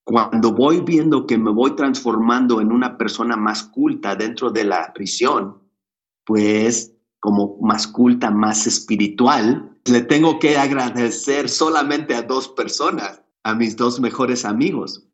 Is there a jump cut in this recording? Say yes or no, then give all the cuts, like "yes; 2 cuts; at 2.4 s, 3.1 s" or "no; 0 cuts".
yes; 2 cuts; at 9.9 s, 13.3 s